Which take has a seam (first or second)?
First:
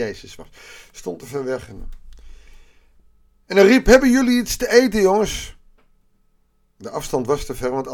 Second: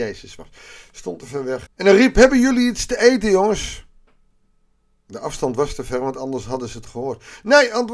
second